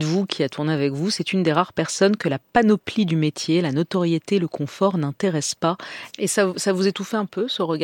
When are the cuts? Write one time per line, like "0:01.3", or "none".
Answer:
0:06.1

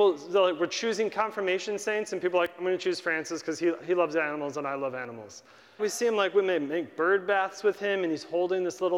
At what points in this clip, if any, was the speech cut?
0:05.8

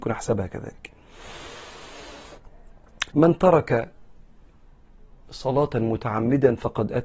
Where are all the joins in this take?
0:03.1

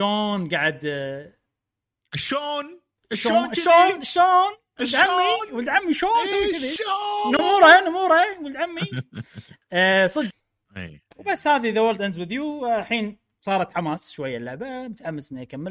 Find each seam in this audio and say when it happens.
0:10.3

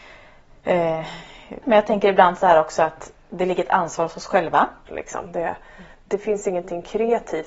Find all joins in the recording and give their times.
0:01.6
0:04.9

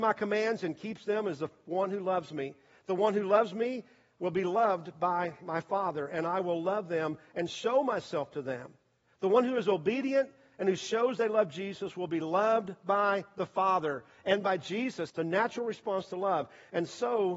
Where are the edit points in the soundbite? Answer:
0:15.1

